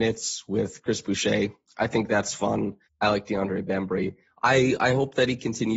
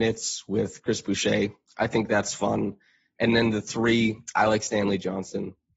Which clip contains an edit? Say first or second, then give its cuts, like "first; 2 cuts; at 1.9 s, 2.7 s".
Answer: first; 2 cuts; at 2.9 s, 4.3 s